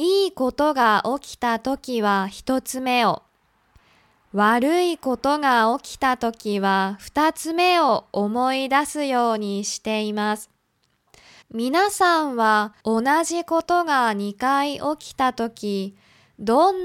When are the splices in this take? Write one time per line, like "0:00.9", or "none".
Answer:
0:11.4
0:12.8